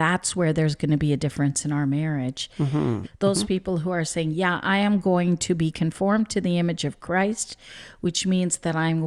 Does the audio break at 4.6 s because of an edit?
no; 1 cut; at 3.0 s

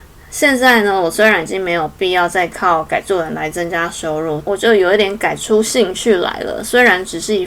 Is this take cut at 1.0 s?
no; 1 cut; at 4.5 s

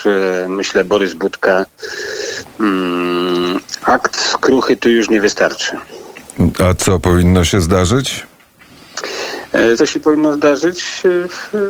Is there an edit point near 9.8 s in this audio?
yes; 1 cut; at 9.8 s

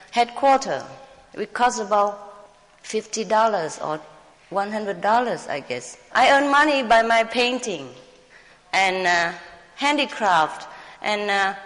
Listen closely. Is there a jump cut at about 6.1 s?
yes; 1 cut; at 6.1 s

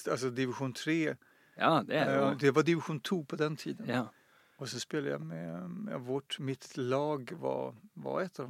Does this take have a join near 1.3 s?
no; 0 cuts

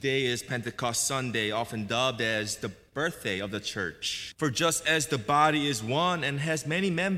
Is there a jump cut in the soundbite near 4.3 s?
yes; 1 cut; at 4.3 s

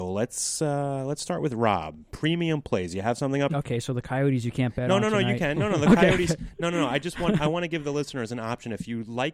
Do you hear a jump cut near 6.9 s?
no; 1 cut; at 3.5 s

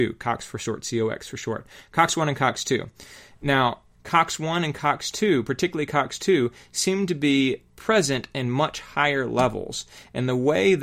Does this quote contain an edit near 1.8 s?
no; 2 cuts; at 3.9 s, 7.7 s

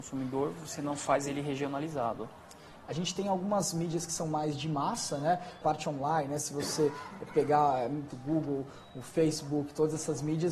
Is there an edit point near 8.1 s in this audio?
yes; 2 cuts; at 5.6 s, 8.1 s

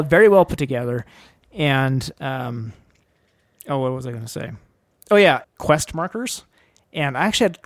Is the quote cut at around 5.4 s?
yes; 1 cut; at 5.4 s

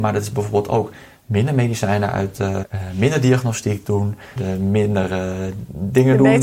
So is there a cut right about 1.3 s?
no; 2 cuts; at 2.6 s, 4.4 s

